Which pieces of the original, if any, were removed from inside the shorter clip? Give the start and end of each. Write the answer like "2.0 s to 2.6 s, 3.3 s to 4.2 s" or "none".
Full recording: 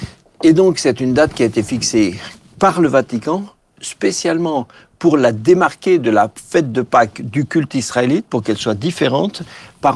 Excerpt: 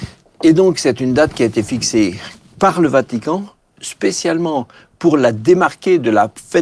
none